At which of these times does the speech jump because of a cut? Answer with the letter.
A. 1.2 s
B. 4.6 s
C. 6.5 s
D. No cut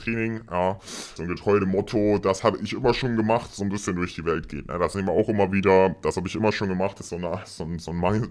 A